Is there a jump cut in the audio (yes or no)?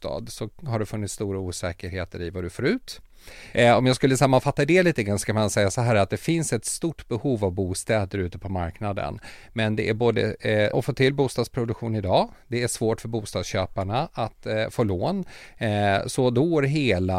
yes